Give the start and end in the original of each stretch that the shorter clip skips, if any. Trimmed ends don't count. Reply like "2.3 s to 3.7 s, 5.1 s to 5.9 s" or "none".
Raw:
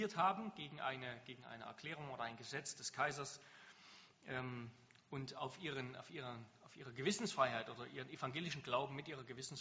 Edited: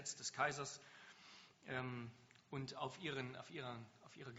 none